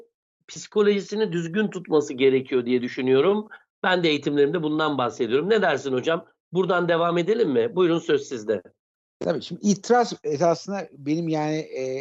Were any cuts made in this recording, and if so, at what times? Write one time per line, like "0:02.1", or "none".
none

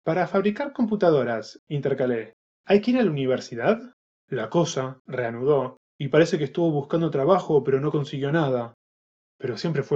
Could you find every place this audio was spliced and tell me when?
0:04.1
0:05.8

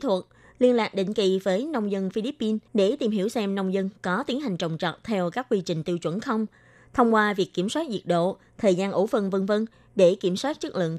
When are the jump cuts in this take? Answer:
0:02.7

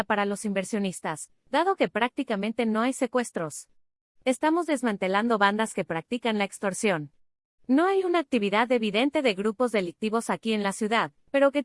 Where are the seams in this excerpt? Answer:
none

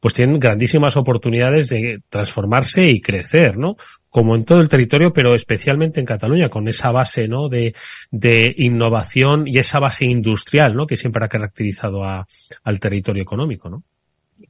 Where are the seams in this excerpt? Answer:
none

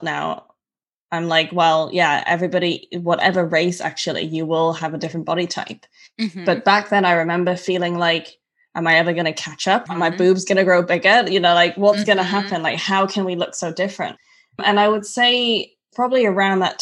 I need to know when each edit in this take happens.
0:09.9

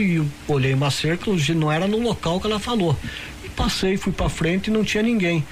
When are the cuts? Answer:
0:01.2

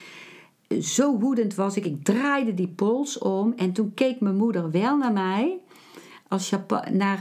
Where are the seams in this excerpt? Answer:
none

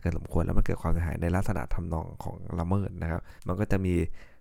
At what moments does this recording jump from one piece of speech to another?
0:03.4

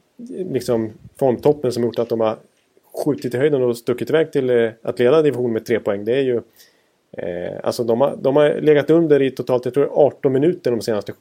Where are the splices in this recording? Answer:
none

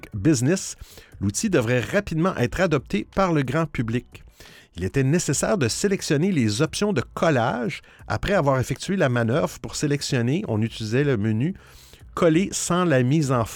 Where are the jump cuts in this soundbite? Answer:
0:04.6

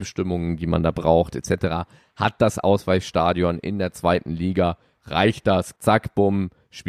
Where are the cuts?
0:05.8

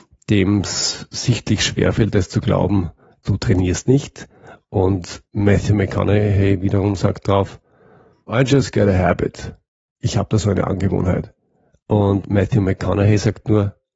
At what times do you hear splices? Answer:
0:03.2
0:08.3
0:11.8

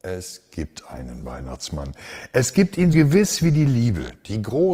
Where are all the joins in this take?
0:02.9

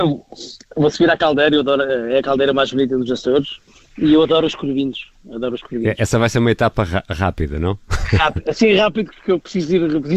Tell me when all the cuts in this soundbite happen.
none

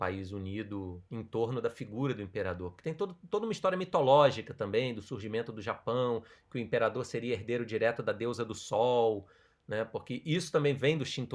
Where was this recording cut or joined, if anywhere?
0:01.1

